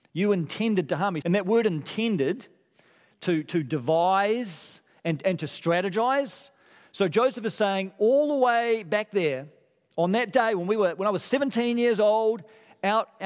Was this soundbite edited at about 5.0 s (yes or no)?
no